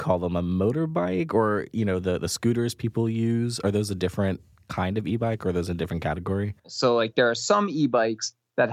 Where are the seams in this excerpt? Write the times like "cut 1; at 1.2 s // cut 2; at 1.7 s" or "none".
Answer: cut 1; at 6.6 s